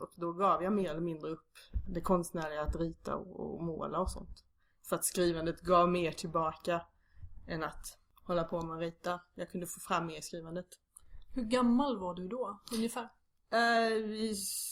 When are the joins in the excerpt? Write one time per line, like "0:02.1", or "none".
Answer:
0:01.9